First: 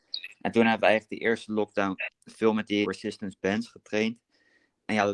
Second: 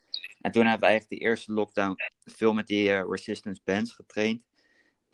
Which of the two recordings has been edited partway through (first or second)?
first